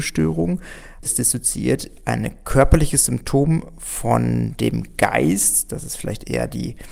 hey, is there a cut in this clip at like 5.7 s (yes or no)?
no